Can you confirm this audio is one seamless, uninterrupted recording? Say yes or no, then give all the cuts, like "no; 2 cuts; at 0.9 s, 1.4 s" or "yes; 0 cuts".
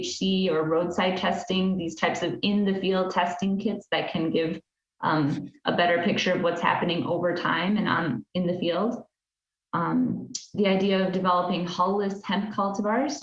yes; 0 cuts